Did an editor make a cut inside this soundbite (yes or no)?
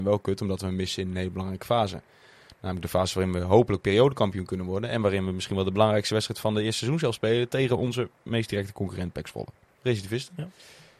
yes